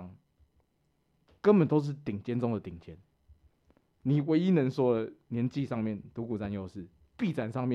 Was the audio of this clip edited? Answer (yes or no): no